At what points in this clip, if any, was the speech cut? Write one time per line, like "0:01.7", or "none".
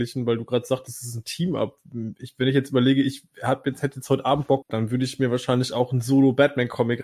0:04.6